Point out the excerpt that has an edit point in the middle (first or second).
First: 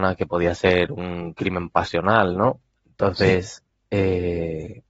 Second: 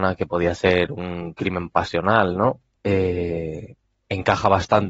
second